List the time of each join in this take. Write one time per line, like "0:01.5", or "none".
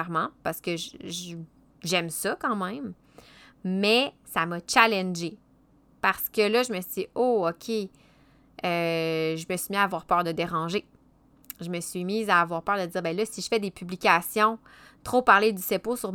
none